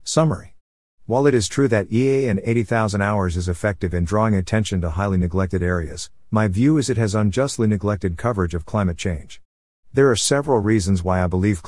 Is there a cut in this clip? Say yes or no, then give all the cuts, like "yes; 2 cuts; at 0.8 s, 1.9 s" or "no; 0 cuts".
no; 0 cuts